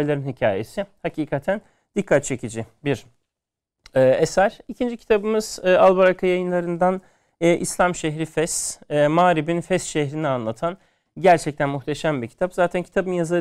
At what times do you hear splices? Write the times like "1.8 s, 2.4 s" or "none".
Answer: none

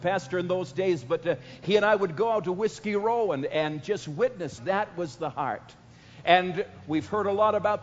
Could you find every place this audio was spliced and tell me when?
4.6 s

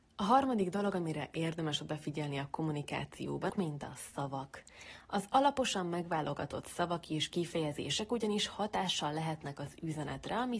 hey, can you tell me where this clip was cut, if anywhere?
3.5 s

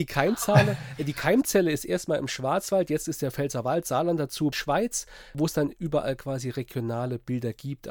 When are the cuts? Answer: 4.5 s

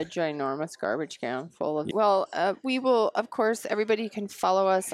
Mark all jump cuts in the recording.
1.9 s

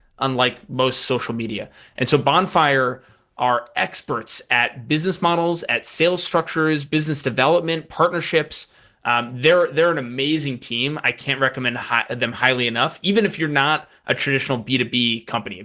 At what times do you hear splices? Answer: none

